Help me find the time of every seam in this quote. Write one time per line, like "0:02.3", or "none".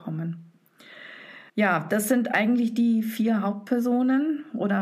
0:01.5